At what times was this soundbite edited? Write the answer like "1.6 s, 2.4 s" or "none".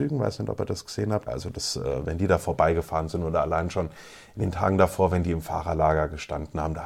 1.3 s